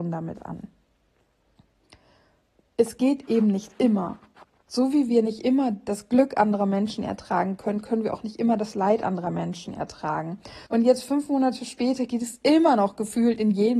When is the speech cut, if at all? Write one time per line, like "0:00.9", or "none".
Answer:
0:10.7

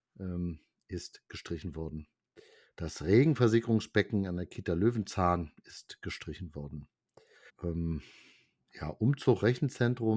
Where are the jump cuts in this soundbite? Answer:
0:02.7
0:07.5

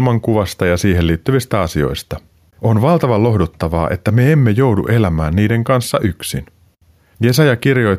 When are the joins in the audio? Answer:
0:02.5

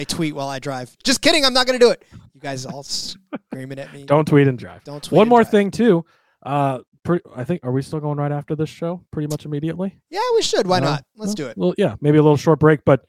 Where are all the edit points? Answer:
none

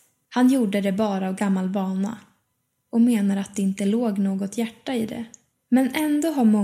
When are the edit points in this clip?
0:05.5

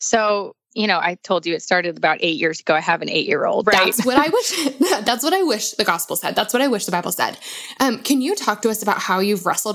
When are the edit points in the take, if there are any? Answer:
0:03.6

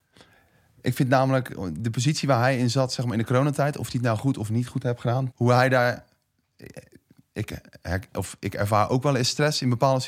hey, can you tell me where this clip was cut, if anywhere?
0:05.3

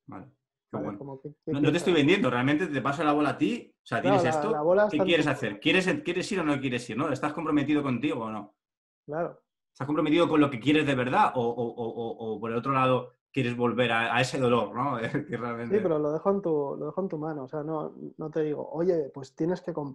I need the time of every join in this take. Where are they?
none

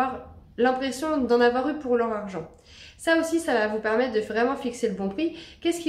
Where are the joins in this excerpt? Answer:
0:01.3

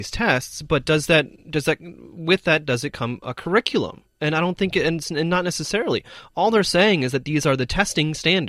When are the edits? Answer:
0:04.1

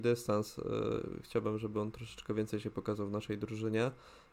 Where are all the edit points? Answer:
none

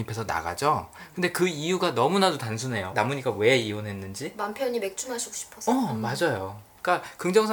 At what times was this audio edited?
0:02.9

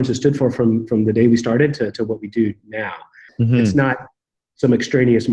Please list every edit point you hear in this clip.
0:03.3

